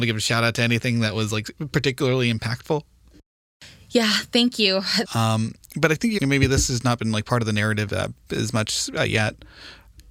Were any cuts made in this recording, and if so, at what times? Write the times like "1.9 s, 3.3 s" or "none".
5.0 s, 6.2 s